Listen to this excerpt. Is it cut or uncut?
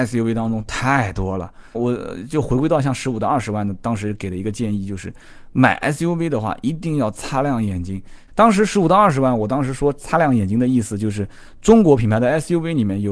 cut